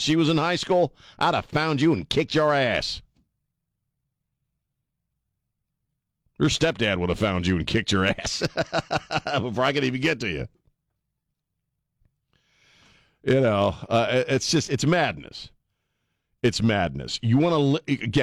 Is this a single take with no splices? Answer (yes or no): yes